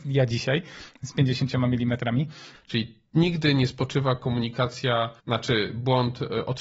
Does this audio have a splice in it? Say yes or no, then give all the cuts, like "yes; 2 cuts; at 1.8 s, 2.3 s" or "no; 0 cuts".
yes; 2 cuts; at 2.5 s, 5.2 s